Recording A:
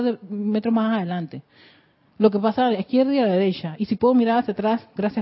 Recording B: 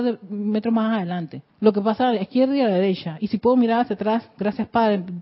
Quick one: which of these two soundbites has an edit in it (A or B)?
B